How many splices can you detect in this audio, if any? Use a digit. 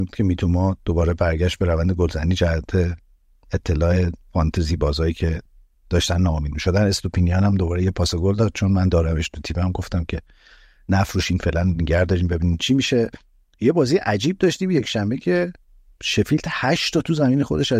0